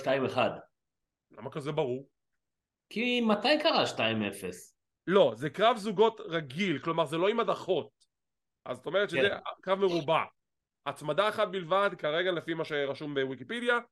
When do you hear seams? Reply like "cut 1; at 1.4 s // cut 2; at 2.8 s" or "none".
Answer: cut 1; at 4.8 s